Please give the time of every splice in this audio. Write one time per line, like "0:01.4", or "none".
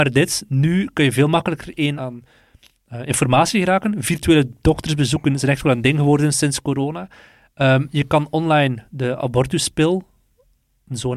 0:02.0